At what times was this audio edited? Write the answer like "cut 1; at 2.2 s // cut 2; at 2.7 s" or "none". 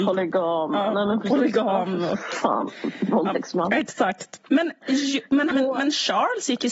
cut 1; at 4.5 s // cut 2; at 5.5 s